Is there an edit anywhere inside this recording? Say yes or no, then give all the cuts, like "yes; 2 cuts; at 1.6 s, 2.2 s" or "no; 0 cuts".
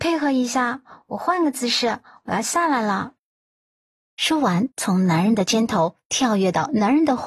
yes; 1 cut; at 4.7 s